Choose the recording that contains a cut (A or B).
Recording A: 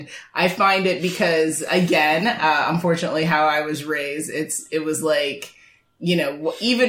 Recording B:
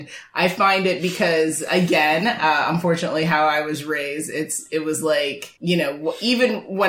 B